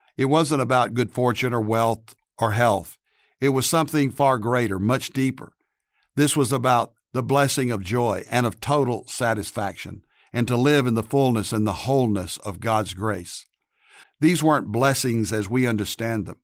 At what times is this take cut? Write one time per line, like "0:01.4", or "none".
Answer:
0:14.0

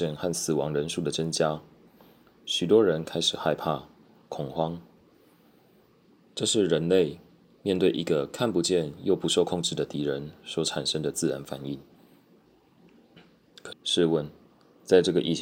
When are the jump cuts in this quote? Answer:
0:13.7

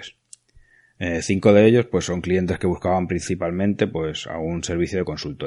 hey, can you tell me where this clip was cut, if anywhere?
none

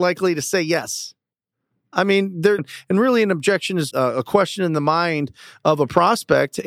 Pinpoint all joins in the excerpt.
0:02.6
0:03.9

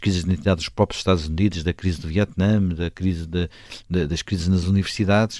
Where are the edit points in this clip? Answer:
none

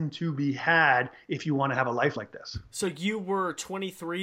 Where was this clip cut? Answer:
none

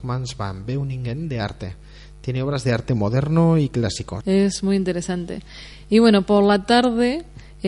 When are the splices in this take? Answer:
0:04.2

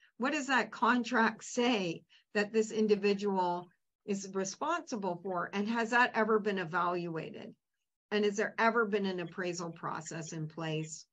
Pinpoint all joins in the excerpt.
none

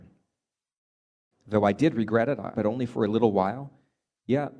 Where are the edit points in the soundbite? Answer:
0:01.3
0:02.5

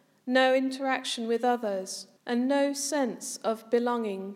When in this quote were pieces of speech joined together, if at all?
0:02.2

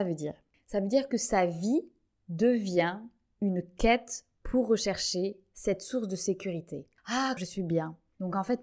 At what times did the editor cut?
0:07.4

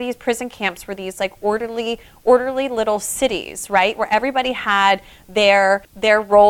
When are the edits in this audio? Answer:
none

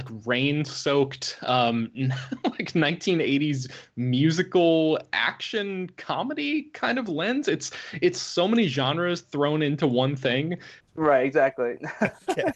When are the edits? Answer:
0:10.8

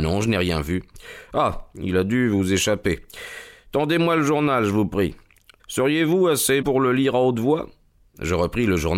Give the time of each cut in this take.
0:05.6
0:06.6

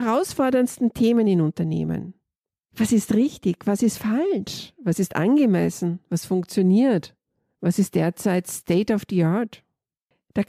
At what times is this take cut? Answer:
none

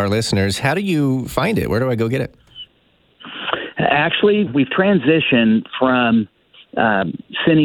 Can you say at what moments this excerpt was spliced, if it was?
0:04.5

